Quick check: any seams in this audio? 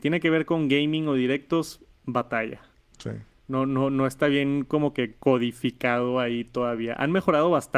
no; 0 cuts

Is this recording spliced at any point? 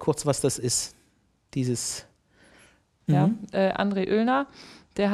yes; 1 cut; at 3.1 s

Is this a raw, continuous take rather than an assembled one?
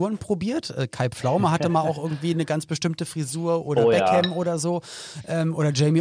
yes; 0 cuts

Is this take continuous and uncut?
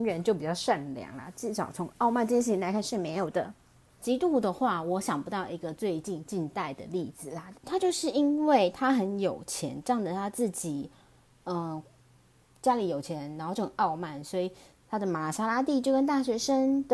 no; 2 cuts; at 3.9 s, 7.5 s

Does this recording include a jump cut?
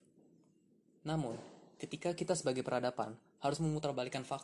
no; 0 cuts

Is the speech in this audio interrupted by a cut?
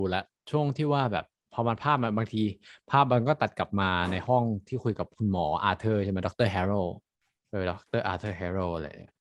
no; 0 cuts

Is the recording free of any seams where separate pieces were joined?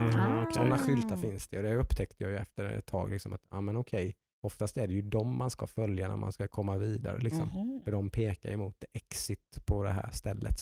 yes; 0 cuts

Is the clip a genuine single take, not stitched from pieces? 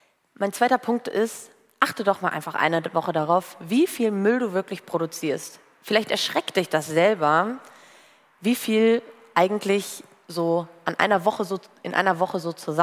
yes; 0 cuts

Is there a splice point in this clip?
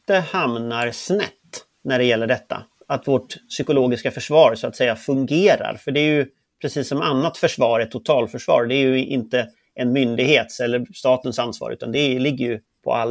no; 0 cuts

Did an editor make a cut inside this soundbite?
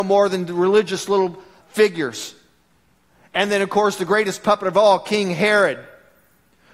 yes; 1 cut; at 1.6 s

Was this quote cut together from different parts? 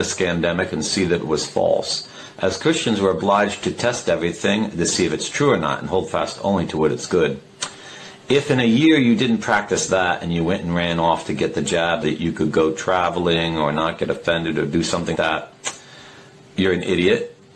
yes; 2 cuts; at 12.0 s, 15.2 s

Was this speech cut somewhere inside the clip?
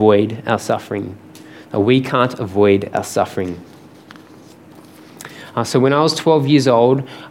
no; 0 cuts

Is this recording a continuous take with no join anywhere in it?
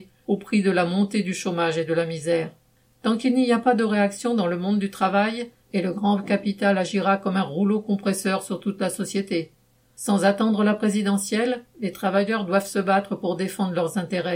no; 2 cuts; at 5.6 s, 9.8 s

